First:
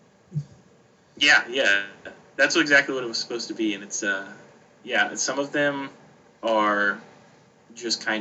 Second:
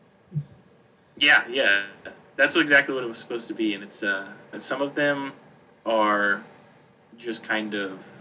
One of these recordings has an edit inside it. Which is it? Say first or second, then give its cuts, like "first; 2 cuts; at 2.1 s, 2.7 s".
second; 1 cut; at 4.5 s